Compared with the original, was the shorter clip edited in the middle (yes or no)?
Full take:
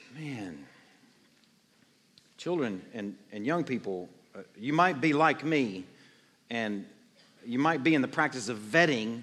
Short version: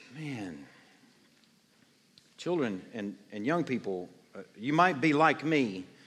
no